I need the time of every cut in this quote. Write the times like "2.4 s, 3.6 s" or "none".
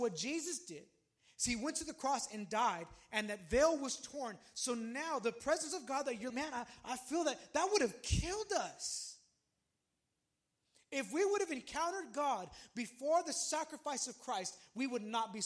6.3 s